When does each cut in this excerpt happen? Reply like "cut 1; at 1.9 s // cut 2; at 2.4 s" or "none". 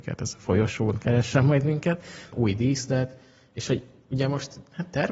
cut 1; at 2.3 s

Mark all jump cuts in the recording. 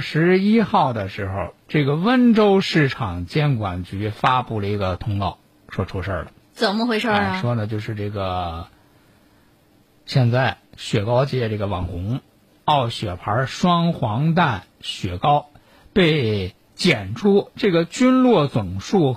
cut 1; at 2.6 s

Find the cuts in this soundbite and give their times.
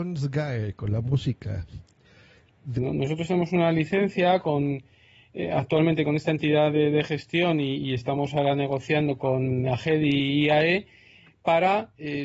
cut 1; at 2.8 s

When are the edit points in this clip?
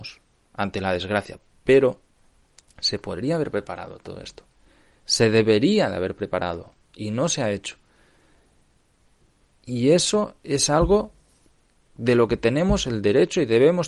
none

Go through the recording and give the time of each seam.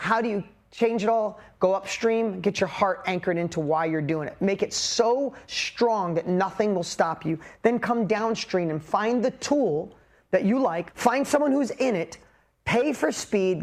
cut 1; at 10.9 s

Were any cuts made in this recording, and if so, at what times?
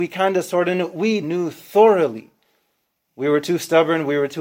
cut 1; at 1.2 s // cut 2; at 3.1 s

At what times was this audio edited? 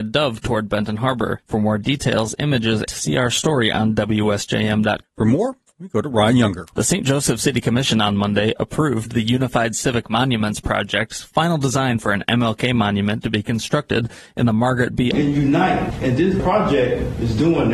cut 1; at 2.9 s // cut 2; at 5.0 s // cut 3; at 15.1 s

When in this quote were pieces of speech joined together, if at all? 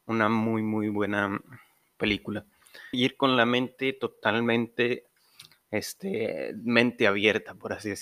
cut 1; at 2.9 s

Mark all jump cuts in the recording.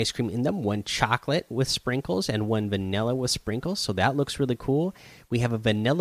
none

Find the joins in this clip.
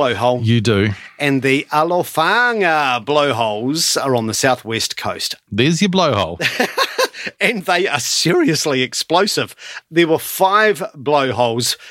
cut 1; at 5.5 s

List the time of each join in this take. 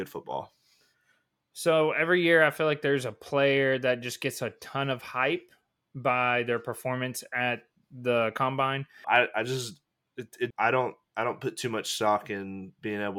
cut 1; at 9.0 s // cut 2; at 10.5 s

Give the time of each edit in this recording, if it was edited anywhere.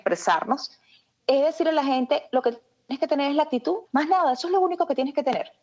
cut 1; at 1.2 s // cut 2; at 3.8 s

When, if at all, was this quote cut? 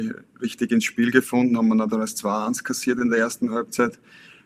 none

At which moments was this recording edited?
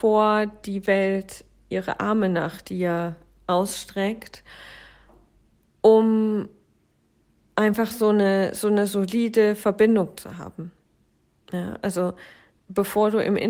none

